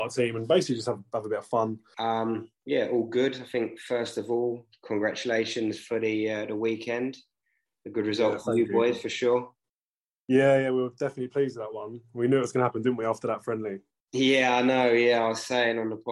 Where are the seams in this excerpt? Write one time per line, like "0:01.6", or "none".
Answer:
0:01.9